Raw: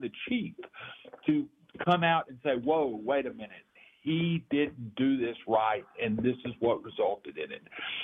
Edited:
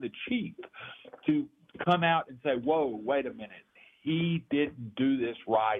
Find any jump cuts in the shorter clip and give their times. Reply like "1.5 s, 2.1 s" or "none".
none